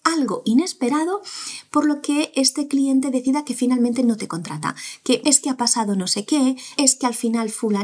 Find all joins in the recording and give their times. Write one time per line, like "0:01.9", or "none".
0:05.2
0:06.8